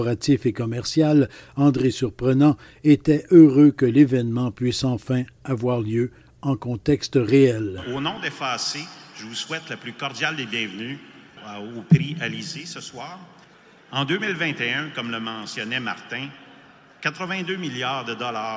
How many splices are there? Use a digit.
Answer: 0